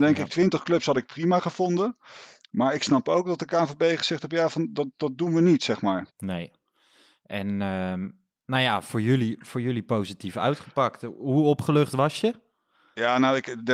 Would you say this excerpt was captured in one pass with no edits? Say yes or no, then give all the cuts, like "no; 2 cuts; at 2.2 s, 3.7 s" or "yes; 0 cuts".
no; 1 cut; at 6.1 s